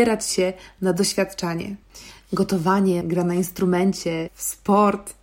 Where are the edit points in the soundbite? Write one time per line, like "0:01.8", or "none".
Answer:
0:03.0
0:04.3